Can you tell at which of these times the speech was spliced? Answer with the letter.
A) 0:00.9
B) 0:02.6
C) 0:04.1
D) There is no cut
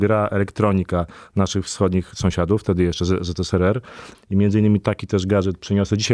C